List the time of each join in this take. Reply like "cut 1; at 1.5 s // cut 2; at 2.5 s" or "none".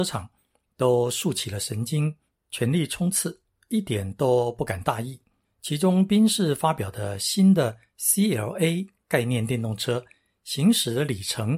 cut 1; at 5.4 s